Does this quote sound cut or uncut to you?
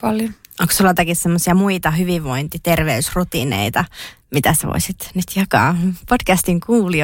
uncut